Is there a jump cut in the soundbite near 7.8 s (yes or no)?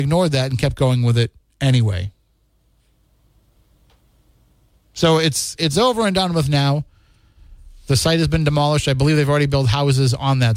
no